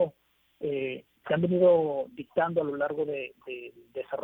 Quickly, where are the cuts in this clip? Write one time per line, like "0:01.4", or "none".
0:01.2